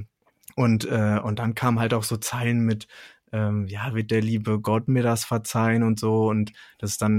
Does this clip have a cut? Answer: no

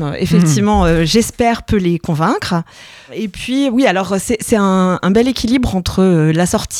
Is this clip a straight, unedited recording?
yes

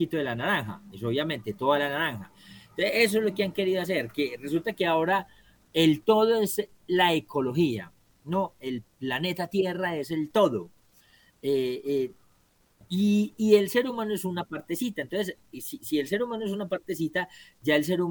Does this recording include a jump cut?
no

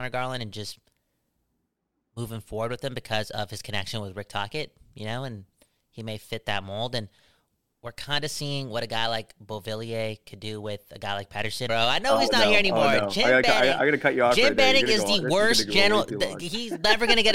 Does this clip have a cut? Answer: yes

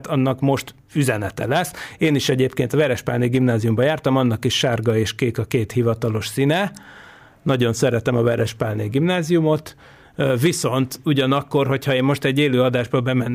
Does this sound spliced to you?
no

